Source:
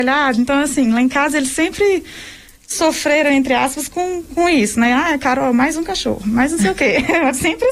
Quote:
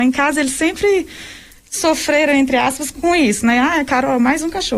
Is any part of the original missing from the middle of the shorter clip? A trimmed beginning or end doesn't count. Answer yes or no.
yes